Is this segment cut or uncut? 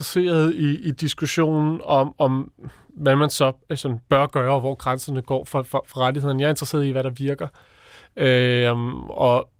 uncut